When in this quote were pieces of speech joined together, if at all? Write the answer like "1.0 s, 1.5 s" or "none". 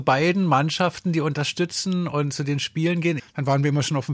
3.2 s

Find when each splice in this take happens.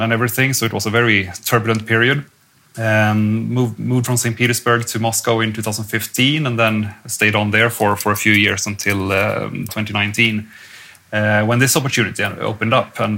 9.7 s

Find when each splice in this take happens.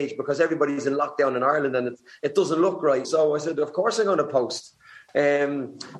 3.0 s

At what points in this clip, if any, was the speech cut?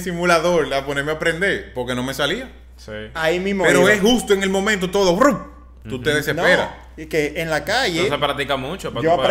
3.1 s

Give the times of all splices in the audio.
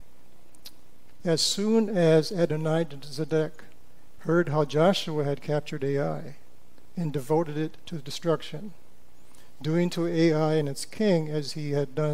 1.2 s, 4.2 s

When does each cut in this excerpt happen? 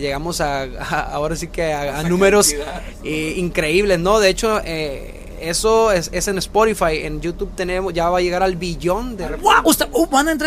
none

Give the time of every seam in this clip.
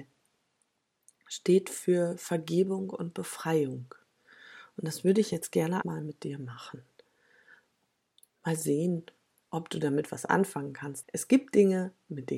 5.8 s, 11.0 s

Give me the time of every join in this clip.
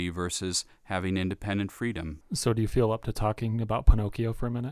2.2 s

